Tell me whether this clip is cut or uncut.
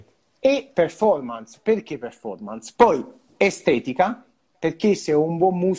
cut